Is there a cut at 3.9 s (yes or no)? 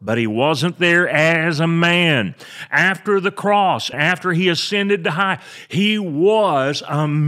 yes